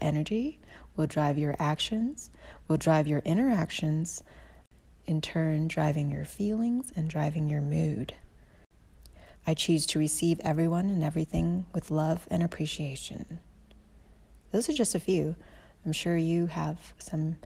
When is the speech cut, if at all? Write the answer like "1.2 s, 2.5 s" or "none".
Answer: 9.3 s

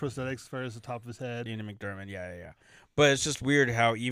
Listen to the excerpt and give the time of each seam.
1.5 s

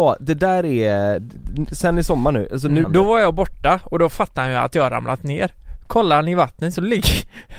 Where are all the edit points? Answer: 2.8 s

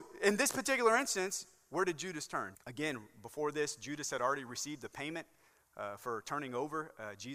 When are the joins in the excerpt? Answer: 2.6 s

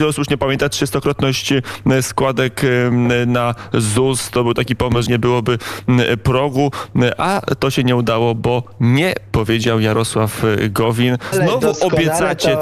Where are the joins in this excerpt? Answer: 5.1 s, 11.3 s

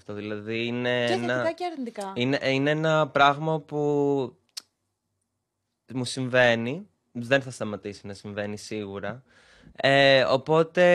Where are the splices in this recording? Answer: 9.7 s

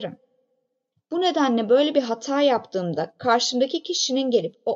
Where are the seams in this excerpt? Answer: 0.9 s

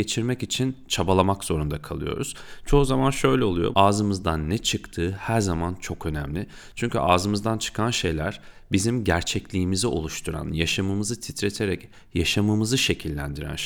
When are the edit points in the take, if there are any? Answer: 3.7 s

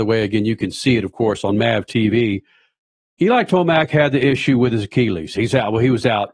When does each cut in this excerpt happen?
5.4 s

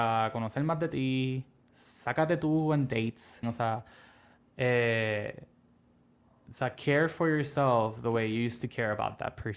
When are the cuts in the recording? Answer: 3.4 s

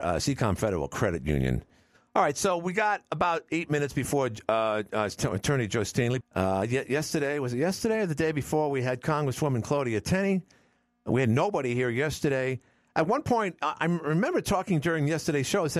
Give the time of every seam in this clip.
6.2 s

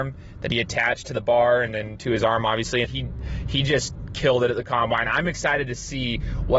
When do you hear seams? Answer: 2.8 s

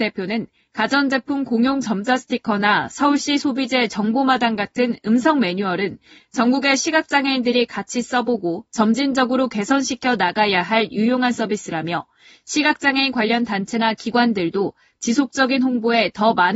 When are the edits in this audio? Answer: none

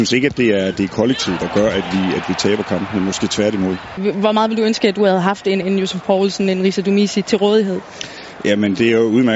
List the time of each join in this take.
4.0 s, 5.6 s

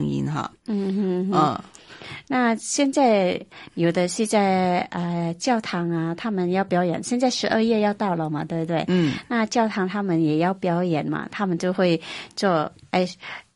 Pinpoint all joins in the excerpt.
none

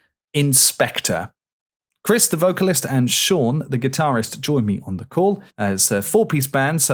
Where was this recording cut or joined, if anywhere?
5.5 s

